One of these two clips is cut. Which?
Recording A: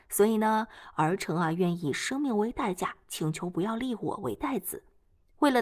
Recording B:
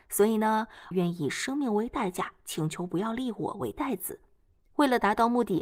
B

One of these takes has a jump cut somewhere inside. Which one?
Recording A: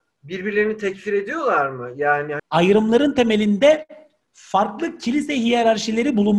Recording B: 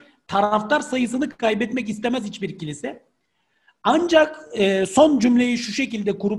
A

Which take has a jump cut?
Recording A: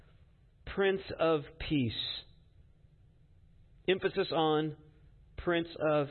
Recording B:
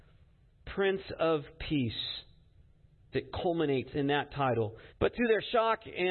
B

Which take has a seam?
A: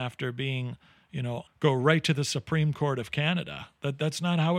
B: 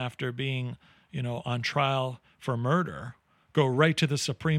A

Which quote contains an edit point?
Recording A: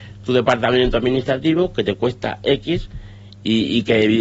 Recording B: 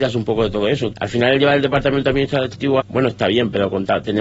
B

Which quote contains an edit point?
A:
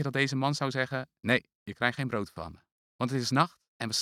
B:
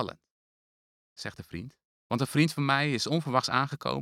B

